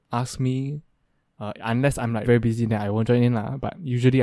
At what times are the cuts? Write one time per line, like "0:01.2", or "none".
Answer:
0:02.2